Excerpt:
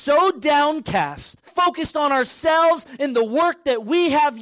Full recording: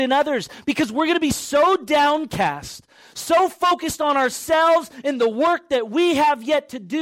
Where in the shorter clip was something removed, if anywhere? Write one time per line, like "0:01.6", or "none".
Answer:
0:01.5